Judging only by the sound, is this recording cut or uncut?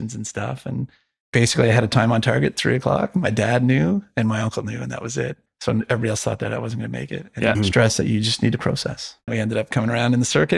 cut